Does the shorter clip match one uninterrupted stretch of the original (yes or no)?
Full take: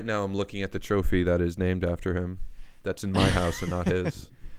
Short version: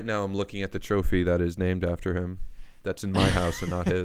yes